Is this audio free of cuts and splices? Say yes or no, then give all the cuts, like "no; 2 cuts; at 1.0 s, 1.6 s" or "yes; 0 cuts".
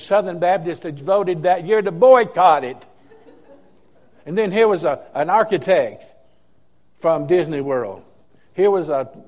no; 1 cut; at 1.0 s